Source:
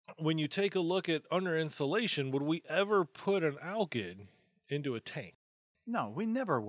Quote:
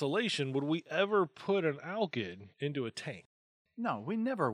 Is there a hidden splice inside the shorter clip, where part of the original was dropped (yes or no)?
yes